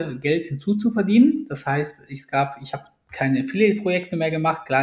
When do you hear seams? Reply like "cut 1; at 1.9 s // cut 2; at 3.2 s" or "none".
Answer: none